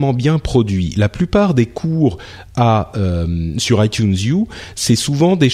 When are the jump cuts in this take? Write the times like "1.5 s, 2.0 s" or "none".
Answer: none

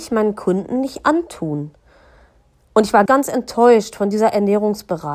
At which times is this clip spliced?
3.1 s

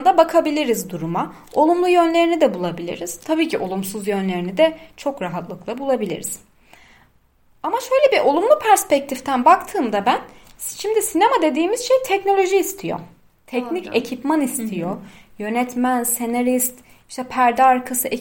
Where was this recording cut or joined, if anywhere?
none

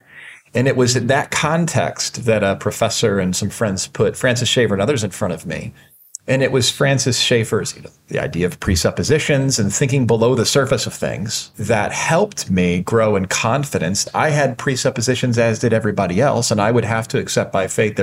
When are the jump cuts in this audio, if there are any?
none

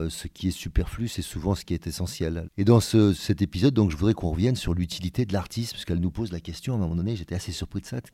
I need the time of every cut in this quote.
2.4 s

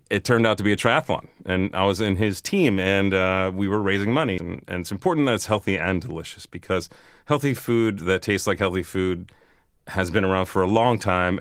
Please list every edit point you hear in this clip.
4.4 s

